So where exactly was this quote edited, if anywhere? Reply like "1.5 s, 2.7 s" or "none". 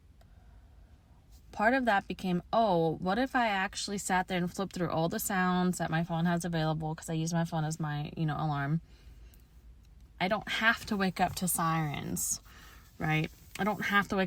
10.1 s

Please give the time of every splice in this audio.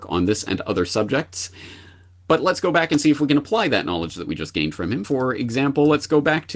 none

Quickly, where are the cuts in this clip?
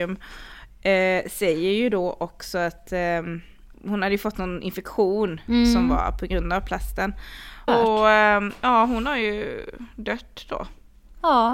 3.7 s, 7.7 s

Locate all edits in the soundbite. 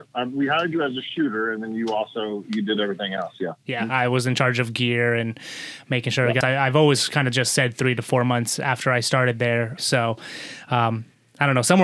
6.4 s, 9.8 s

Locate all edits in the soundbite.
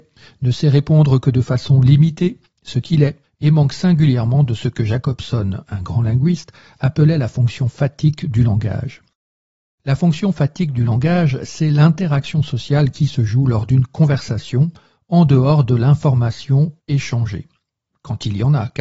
3.2 s

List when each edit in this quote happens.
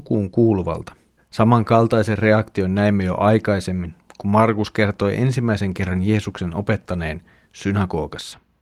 1.2 s

